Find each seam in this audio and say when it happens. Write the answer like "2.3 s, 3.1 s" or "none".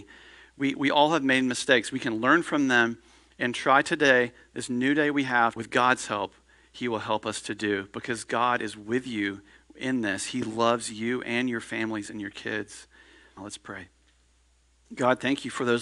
5.6 s, 13.4 s